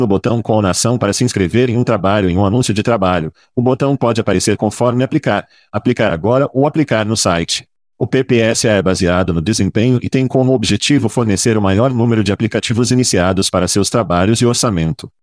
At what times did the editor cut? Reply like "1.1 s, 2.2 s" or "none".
none